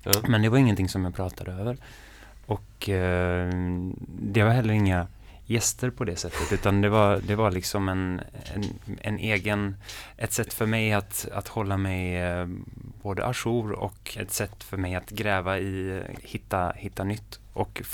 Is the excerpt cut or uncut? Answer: cut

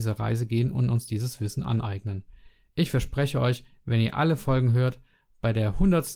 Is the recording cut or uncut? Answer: uncut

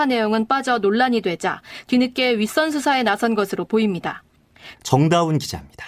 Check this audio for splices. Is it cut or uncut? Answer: cut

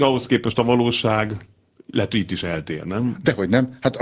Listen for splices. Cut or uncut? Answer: uncut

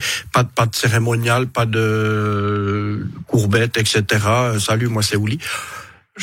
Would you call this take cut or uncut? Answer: uncut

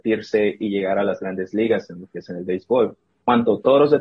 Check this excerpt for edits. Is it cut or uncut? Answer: uncut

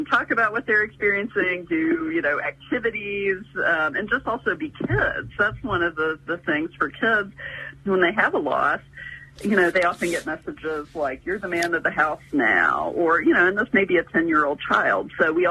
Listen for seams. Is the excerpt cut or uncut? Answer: uncut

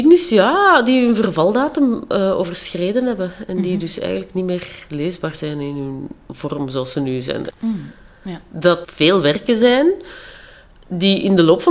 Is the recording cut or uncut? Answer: cut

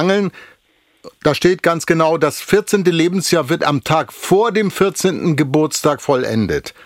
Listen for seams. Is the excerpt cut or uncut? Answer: uncut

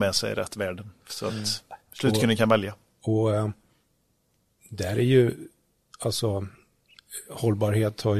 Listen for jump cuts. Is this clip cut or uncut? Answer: uncut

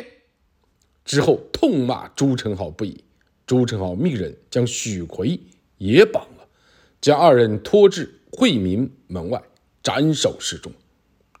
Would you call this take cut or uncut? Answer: uncut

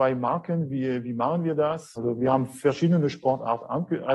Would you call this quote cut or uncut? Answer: cut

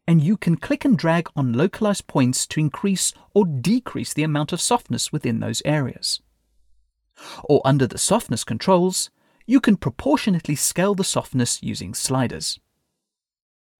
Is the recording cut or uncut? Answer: uncut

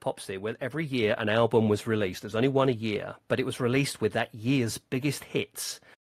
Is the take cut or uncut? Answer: uncut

